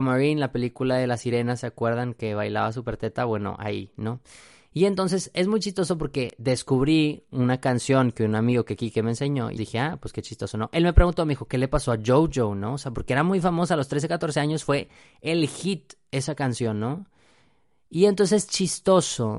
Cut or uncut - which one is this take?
cut